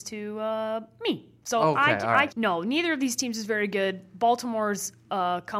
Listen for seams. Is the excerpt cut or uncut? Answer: cut